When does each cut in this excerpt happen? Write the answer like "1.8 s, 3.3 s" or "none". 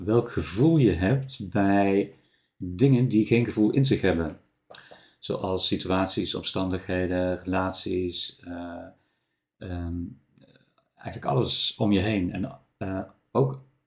none